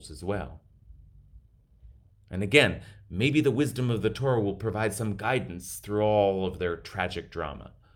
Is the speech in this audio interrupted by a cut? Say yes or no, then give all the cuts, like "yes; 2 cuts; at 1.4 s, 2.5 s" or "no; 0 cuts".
yes; 1 cut; at 2.1 s